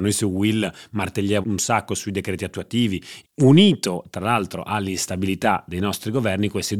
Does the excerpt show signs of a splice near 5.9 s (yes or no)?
no